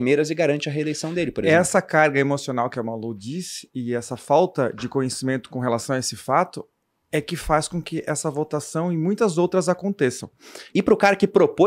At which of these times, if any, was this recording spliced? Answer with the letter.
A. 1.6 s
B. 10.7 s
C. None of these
B